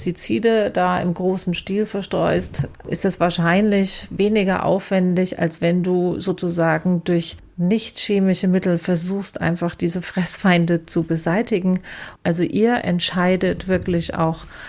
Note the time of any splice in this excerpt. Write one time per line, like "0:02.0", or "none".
0:12.2